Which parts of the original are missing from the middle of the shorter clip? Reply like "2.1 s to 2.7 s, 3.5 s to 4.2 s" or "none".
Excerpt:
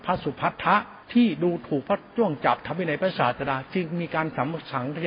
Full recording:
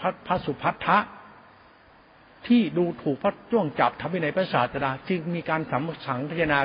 1.2 s to 2.4 s